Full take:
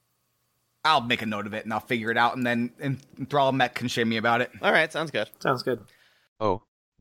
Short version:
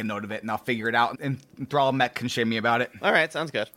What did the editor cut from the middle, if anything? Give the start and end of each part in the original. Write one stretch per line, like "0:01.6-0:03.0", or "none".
0:02.4-0:02.7